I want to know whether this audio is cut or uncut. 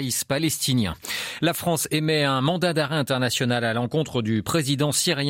uncut